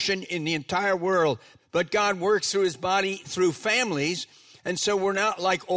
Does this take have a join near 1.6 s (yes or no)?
yes